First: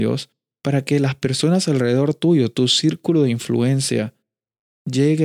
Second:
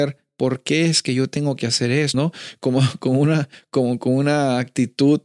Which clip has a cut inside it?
second; 1 cut; at 2.1 s

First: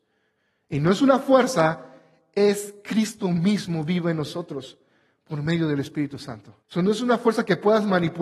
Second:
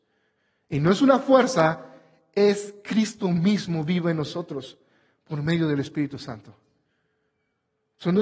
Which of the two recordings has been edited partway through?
first; 1 cut; at 6.6 s

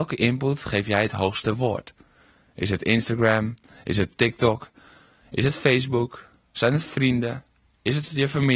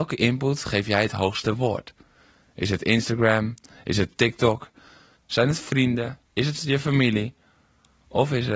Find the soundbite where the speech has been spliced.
second; 2 cuts; at 5.2 s, 6.3 s

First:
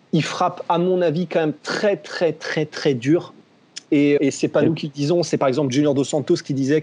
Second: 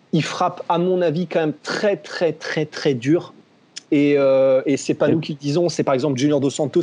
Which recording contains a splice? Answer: first; 1 cut; at 4.2 s

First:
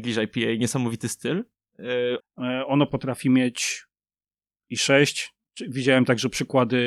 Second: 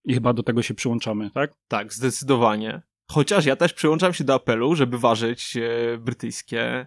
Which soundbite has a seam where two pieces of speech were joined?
first; 1 cut; at 2.2 s

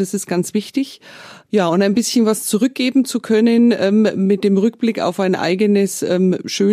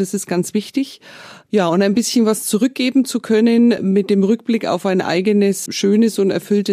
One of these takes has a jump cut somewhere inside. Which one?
second; 2 cuts; at 3.8 s, 5.7 s

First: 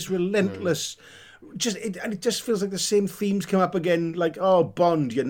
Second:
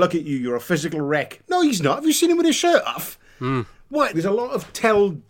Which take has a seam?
second; 1 cut; at 4.1 s

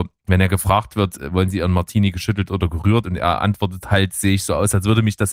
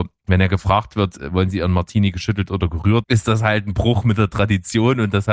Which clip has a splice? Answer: second; 1 cut; at 3.0 s

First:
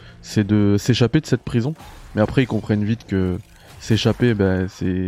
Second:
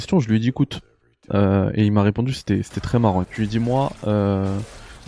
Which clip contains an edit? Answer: second; 1 cut; at 3.2 s

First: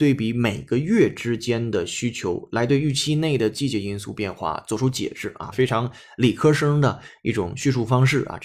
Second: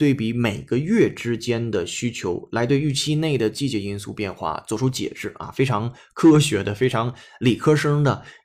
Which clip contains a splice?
first; 1 cut; at 5.5 s

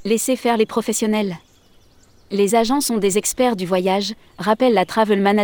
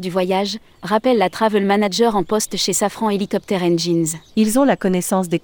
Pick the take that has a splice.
second; 1 cut; at 4.3 s

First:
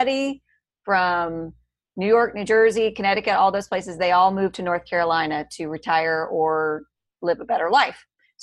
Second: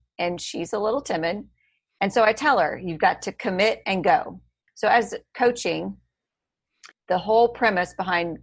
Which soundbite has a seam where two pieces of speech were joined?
second; 2 cuts; at 4.7 s, 6.9 s

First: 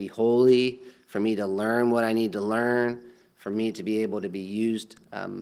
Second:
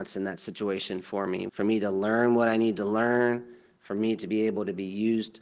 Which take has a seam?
second; 1 cut; at 1.5 s

